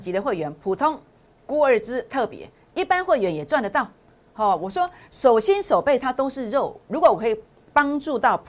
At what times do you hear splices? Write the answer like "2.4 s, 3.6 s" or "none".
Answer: none